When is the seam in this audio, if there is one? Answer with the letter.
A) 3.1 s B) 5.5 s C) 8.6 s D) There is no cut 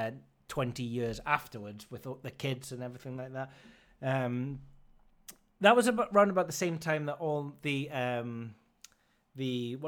D